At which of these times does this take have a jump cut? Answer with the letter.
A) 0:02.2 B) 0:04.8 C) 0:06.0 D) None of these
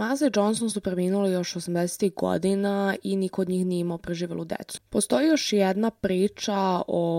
B